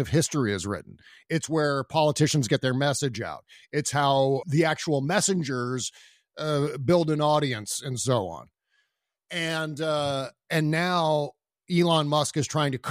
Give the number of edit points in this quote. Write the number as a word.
one